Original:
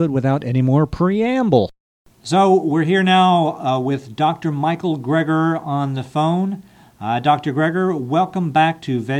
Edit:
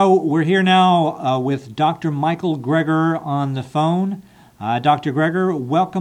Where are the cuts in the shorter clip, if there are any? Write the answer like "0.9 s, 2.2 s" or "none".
none